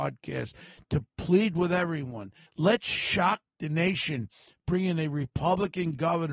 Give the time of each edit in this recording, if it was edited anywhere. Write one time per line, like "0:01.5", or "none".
0:02.5